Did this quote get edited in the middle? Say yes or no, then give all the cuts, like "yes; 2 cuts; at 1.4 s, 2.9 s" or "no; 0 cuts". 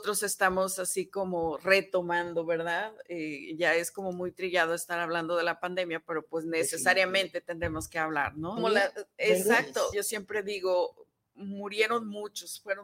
yes; 2 cuts; at 8.6 s, 9.9 s